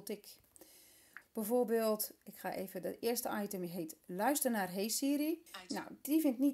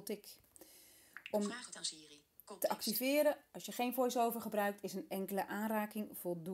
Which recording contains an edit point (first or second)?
first